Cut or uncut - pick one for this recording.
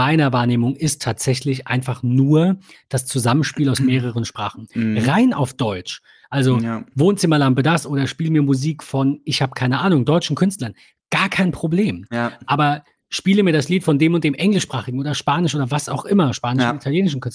uncut